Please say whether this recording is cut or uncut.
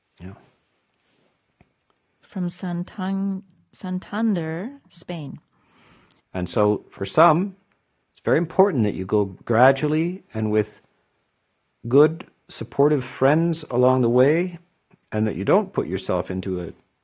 cut